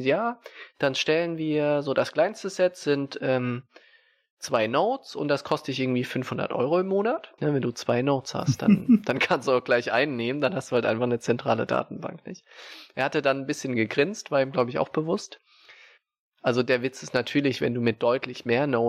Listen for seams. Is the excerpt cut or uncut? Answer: cut